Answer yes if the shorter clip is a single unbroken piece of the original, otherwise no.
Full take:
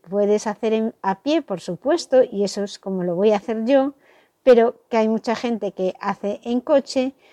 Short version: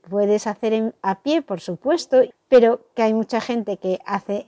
no